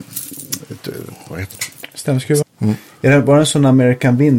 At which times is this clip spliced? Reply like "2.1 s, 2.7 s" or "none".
2.4 s

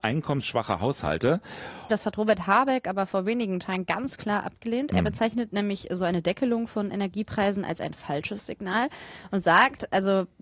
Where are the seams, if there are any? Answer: 1.9 s

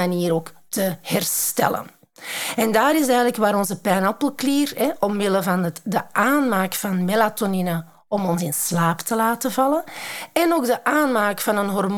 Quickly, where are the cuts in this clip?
none

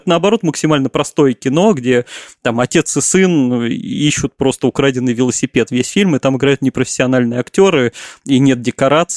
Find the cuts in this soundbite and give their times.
none

